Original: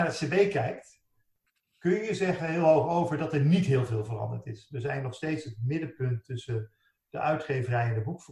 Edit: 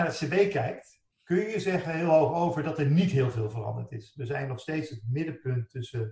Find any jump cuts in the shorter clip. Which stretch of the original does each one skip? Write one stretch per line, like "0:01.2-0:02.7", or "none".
0:01.1-0:01.7